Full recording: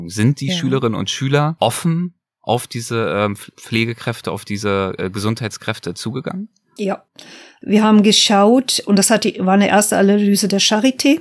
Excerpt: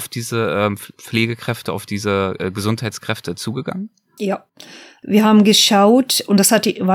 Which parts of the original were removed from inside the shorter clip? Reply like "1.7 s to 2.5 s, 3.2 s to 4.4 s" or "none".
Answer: none